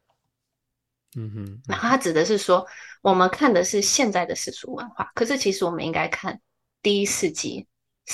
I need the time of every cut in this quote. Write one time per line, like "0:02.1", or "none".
none